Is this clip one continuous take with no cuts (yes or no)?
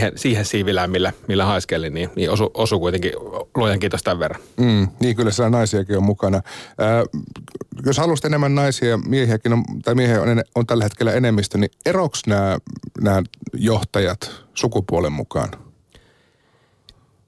yes